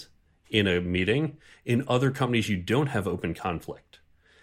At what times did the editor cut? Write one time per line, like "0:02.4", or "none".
none